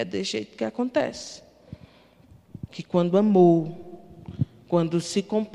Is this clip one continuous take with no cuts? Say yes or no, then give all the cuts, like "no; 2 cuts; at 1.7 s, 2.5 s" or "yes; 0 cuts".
no; 1 cut; at 2.7 s